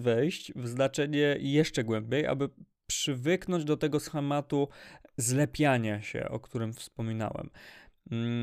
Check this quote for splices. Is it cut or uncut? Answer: uncut